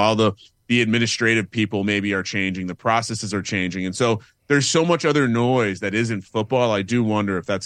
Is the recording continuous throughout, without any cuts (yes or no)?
yes